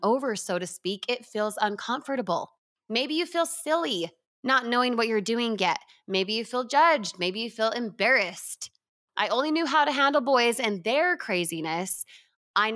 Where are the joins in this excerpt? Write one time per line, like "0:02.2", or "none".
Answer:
0:09.1